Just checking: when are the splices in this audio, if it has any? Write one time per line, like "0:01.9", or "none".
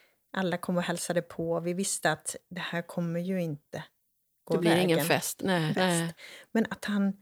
0:05.7